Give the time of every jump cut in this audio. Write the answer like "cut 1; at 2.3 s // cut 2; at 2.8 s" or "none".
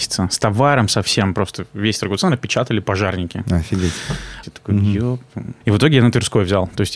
cut 1; at 4.4 s // cut 2; at 5.6 s